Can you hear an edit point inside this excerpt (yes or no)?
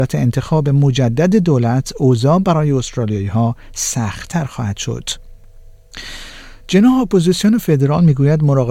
no